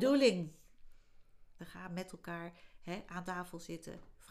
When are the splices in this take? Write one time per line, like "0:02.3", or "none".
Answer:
0:01.6

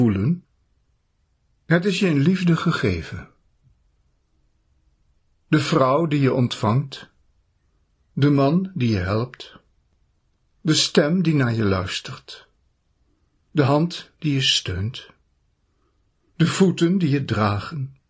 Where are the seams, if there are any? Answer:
none

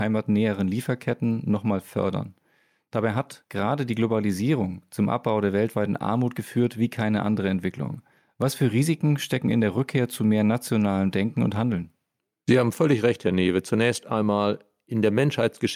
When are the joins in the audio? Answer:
none

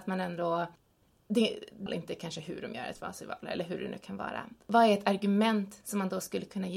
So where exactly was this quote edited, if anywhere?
0:01.9

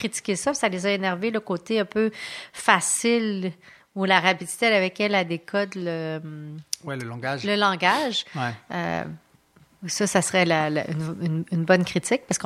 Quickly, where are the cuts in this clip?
none

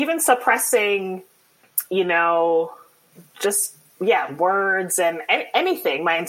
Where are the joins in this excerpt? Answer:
none

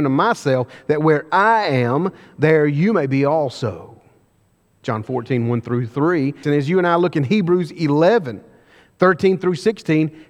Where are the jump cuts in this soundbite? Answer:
0:06.4

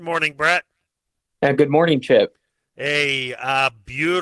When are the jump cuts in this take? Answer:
none

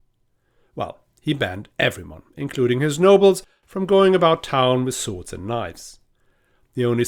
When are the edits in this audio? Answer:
none

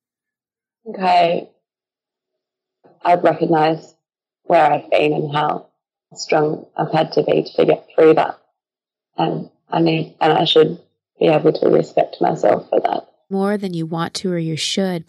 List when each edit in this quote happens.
0:10.2
0:13.3

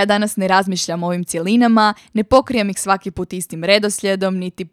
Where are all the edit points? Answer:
none

